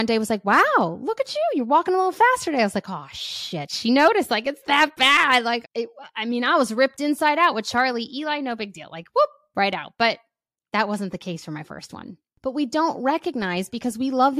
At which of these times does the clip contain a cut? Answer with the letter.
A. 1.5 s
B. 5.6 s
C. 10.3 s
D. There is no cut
B